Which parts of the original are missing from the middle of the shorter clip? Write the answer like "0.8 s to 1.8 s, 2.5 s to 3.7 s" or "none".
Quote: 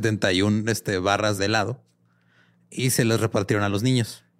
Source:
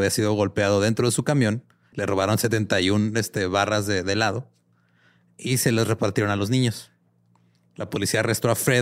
3.8 s to 4.0 s